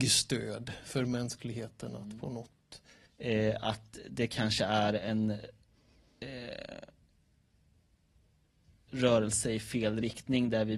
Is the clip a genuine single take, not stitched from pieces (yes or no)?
no